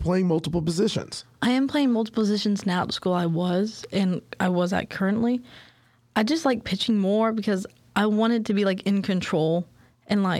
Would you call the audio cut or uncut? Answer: uncut